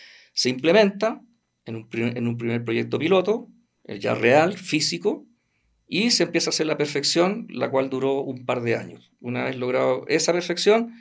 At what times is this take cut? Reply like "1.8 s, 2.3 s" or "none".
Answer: none